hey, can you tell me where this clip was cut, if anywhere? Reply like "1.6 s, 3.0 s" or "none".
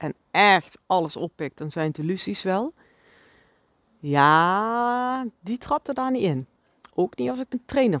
none